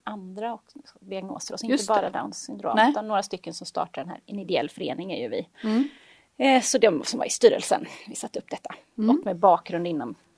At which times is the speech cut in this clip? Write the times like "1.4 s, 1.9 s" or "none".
none